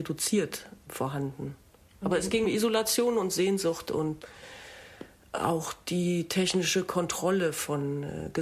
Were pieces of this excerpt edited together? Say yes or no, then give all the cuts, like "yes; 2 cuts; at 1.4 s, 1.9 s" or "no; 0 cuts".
yes; 1 cut; at 2.4 s